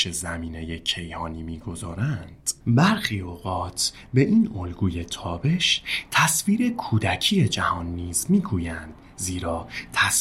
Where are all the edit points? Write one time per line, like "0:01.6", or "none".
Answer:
0:02.6